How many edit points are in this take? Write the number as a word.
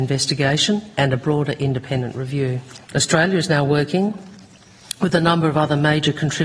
one